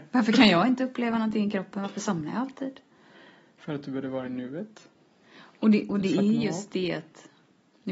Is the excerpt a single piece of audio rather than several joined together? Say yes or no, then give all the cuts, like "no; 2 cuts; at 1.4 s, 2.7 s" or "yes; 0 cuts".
yes; 0 cuts